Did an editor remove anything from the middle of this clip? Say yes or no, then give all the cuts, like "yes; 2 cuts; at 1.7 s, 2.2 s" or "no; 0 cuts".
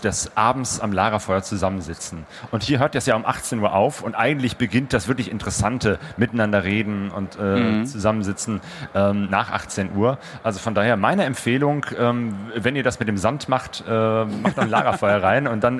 no; 0 cuts